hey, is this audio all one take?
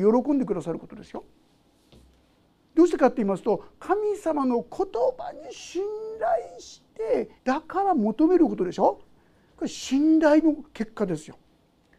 no; 1 cut; at 7.4 s

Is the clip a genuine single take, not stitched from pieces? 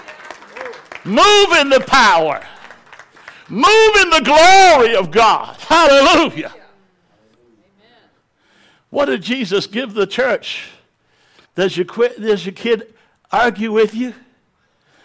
no; 1 cut; at 11.4 s

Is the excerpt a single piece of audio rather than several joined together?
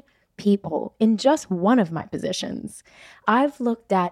yes; 0 cuts

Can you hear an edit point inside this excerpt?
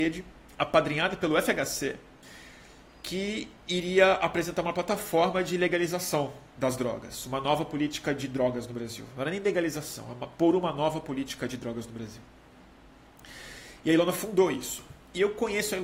no; 0 cuts

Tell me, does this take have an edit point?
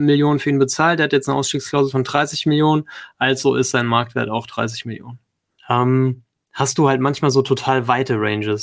yes; 1 cut; at 5.6 s

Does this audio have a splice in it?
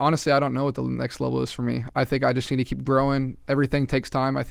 no; 0 cuts

